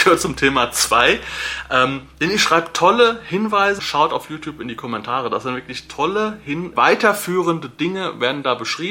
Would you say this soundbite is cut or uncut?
cut